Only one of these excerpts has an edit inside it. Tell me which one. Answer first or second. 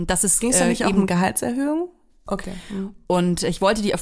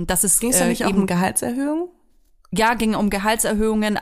first